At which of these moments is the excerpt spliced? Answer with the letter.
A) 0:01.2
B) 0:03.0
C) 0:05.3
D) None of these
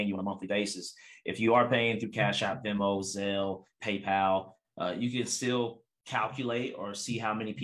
D